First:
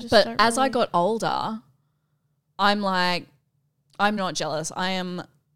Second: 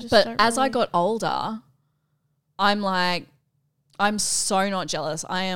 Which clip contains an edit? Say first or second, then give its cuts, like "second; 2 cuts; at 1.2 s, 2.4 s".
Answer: first; 1 cut; at 4.2 s